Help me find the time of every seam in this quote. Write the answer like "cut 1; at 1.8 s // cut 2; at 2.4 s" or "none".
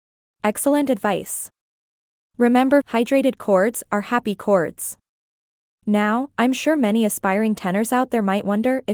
cut 1; at 2.8 s